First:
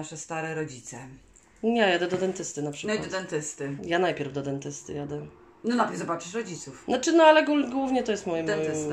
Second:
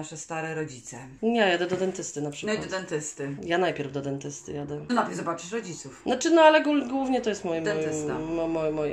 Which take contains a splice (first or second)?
second